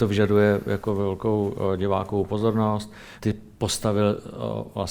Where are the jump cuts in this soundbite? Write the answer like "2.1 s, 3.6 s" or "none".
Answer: 3.2 s